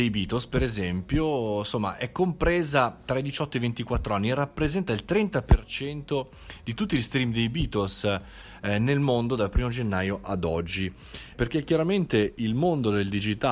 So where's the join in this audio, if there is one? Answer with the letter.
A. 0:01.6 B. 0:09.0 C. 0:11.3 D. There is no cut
C